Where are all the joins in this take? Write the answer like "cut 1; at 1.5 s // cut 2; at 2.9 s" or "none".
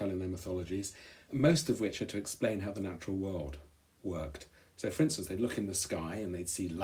cut 1; at 1.3 s